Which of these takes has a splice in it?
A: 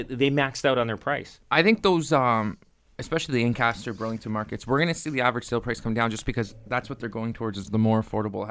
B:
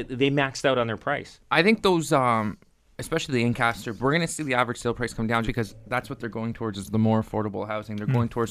B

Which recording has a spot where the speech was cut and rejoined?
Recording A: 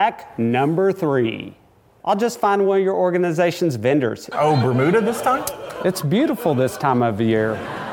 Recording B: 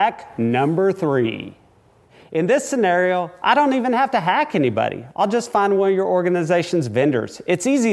A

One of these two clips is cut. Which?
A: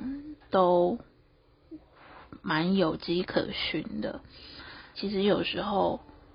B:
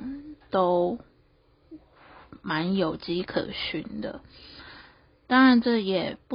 A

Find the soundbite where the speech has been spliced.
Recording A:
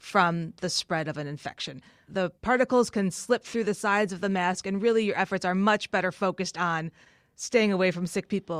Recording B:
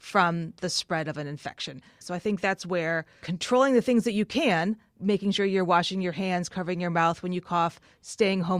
B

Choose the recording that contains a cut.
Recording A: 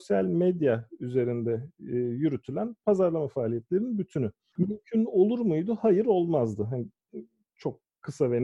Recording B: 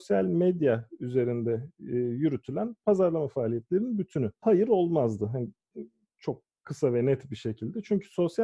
B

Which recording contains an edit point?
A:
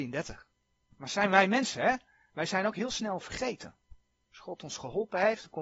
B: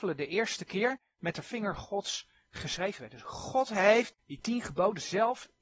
B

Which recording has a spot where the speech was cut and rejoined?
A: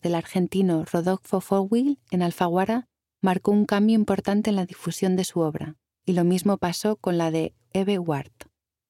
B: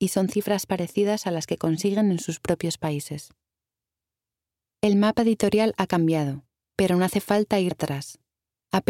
B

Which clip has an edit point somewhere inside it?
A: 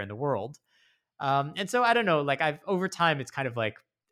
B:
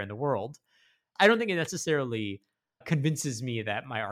B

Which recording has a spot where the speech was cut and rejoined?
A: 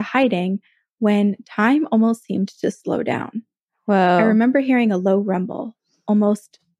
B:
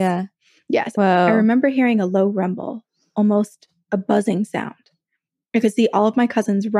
B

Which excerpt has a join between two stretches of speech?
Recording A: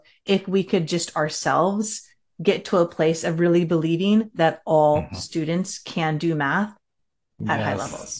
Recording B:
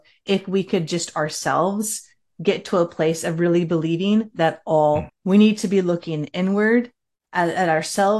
B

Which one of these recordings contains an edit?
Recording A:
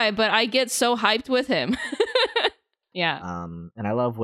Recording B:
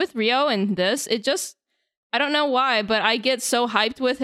A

